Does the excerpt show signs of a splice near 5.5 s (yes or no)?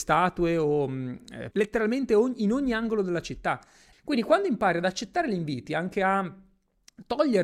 no